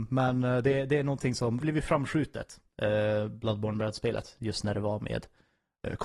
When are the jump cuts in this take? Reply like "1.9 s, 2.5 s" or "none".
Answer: 1.6 s